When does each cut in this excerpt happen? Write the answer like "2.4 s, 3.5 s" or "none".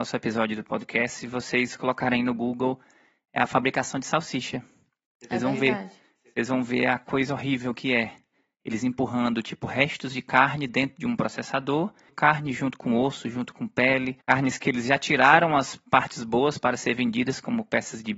12.1 s, 14.2 s